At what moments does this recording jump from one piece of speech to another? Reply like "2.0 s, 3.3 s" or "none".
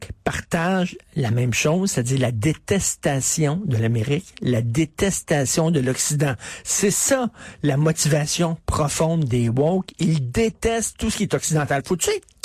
none